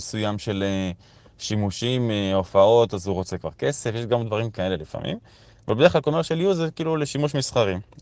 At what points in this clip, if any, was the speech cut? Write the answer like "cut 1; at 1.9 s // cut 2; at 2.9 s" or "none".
none